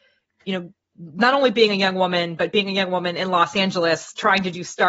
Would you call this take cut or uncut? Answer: uncut